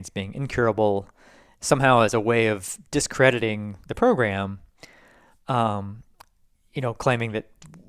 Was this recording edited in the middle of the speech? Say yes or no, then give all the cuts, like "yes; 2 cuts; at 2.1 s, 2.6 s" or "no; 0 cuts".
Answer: no; 0 cuts